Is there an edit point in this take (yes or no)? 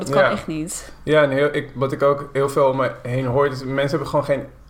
no